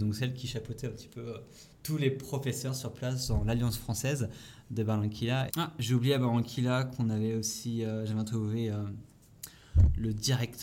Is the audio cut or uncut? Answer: cut